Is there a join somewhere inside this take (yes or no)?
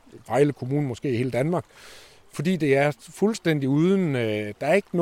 no